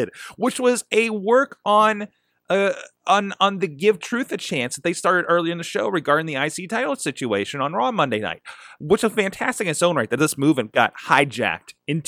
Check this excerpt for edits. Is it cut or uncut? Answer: uncut